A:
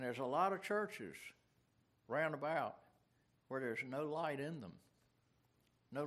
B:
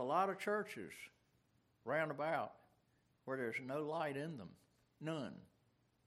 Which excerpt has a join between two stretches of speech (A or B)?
B